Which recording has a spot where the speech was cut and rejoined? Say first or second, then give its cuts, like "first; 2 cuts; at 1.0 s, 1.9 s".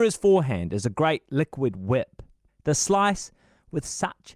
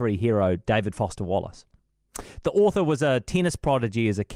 first; 1 cut; at 2.5 s